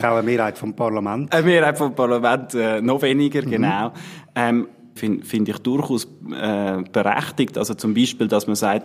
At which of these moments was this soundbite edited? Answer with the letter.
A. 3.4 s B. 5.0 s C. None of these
B